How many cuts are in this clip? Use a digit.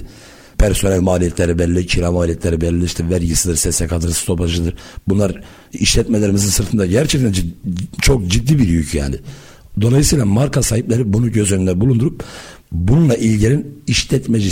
0